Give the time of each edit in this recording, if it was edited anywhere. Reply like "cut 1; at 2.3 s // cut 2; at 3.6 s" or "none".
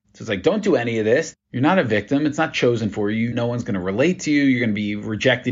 cut 1; at 1.3 s // cut 2; at 3.3 s